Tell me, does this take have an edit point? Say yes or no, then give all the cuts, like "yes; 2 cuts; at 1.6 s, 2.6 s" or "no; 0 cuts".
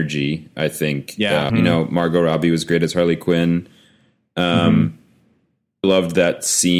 yes; 2 cuts; at 1.5 s, 5.8 s